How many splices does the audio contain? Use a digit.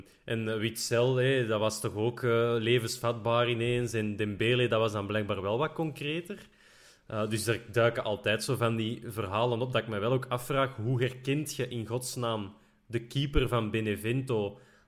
0